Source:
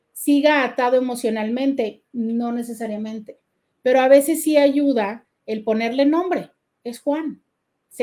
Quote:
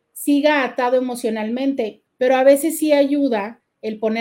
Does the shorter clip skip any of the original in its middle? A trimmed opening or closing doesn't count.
yes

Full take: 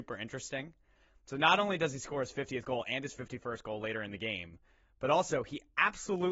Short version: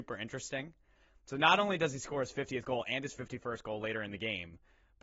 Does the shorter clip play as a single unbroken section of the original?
yes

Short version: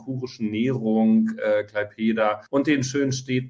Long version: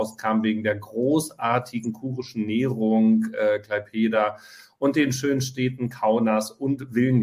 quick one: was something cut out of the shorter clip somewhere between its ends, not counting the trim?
yes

